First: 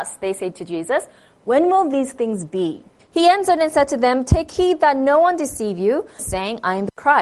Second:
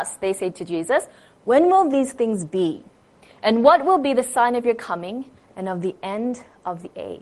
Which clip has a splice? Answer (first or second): first